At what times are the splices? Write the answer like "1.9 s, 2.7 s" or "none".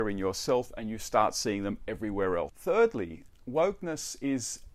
2.5 s